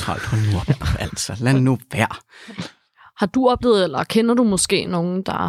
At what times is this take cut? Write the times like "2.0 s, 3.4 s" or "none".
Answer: none